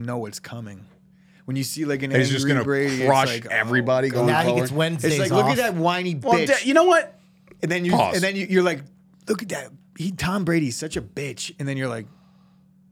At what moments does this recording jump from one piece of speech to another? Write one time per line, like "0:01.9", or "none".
none